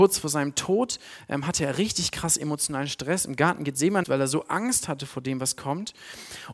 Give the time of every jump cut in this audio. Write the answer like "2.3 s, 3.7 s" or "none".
4.0 s